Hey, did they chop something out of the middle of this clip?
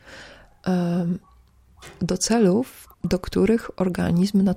yes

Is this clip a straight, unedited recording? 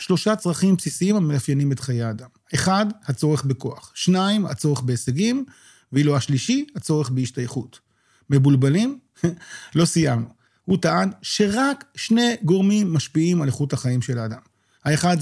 no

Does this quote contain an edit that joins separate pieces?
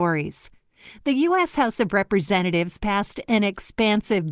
no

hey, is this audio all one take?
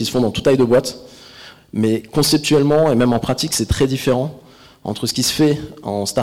yes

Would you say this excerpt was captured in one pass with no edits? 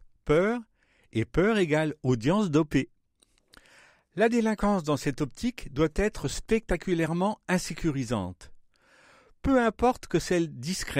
yes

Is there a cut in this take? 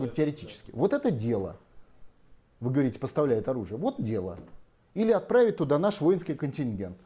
no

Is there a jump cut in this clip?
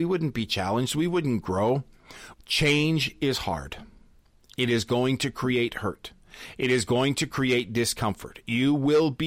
yes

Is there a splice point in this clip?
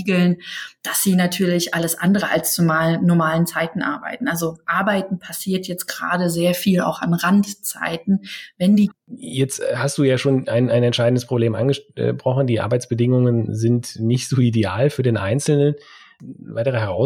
yes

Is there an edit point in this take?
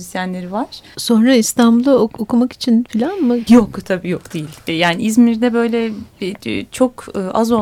yes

